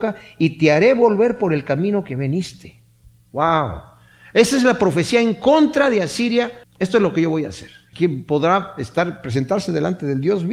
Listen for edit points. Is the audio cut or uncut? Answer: cut